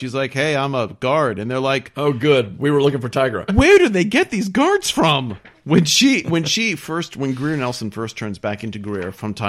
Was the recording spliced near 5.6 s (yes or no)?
no